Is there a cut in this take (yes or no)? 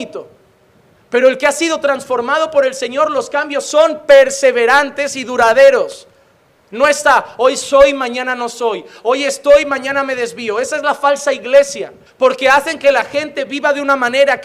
yes